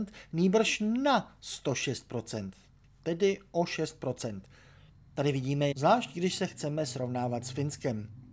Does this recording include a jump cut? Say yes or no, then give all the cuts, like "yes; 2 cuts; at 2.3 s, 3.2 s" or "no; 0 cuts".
yes; 1 cut; at 5.7 s